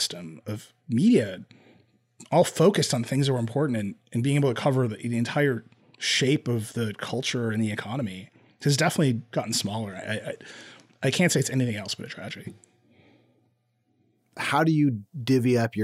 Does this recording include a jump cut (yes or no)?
no